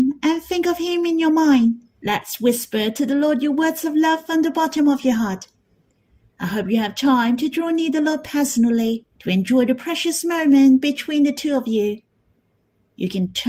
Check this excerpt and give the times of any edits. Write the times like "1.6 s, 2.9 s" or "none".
1.9 s, 9.1 s